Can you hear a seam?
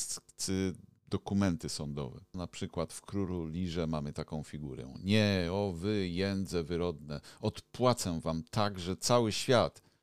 yes; 1 cut; at 2.3 s

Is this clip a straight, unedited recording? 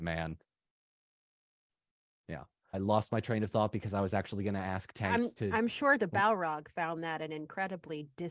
no; 1 cut; at 2.7 s

